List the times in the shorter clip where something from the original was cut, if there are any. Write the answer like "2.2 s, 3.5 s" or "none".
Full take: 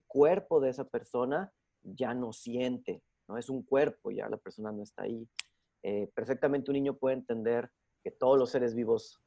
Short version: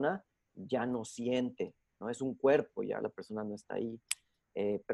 none